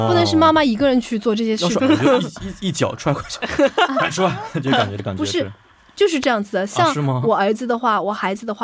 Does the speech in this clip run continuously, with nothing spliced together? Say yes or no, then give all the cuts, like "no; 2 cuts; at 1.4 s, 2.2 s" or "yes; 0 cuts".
no; 1 cut; at 1.8 s